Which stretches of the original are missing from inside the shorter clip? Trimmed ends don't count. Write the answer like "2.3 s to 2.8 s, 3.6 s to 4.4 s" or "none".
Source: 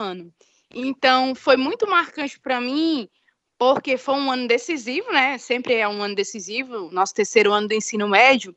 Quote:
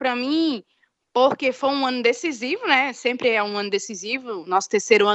none